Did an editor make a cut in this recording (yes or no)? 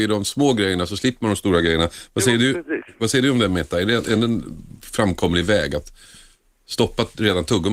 no